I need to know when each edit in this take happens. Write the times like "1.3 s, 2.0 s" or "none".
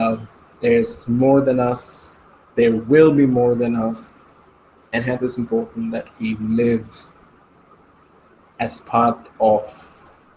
none